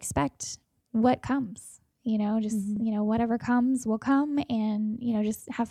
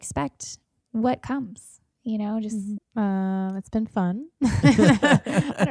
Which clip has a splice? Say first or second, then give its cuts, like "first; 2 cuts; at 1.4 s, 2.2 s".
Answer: second; 1 cut; at 2.8 s